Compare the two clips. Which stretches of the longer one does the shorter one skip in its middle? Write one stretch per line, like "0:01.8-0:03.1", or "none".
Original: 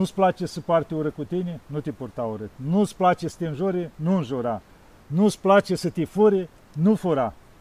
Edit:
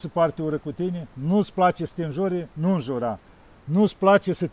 0:01.6-0:02.5